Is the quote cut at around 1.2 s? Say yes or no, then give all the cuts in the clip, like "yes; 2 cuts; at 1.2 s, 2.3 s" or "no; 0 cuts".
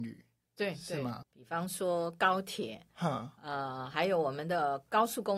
yes; 1 cut; at 1.2 s